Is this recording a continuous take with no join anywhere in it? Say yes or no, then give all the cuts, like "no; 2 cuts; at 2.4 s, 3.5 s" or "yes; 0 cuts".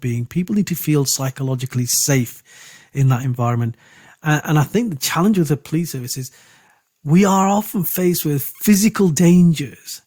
yes; 0 cuts